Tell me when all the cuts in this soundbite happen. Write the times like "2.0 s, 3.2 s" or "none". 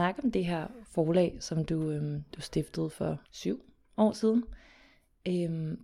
3.3 s